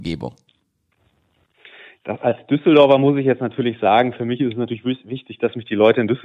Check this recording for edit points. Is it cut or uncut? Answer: uncut